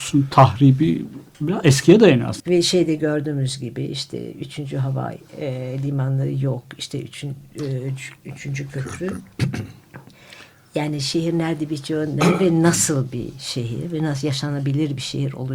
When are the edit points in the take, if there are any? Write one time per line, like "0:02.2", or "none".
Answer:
0:02.4